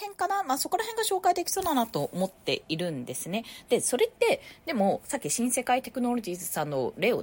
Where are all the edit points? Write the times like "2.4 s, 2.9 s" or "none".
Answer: none